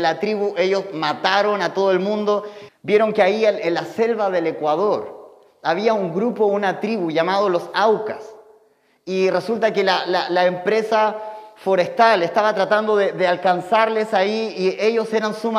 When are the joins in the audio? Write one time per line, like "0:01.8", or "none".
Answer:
0:02.7